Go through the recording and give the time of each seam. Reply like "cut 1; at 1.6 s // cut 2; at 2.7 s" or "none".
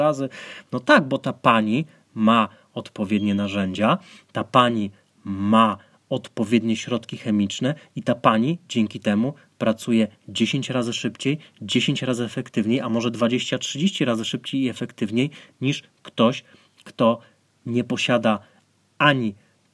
none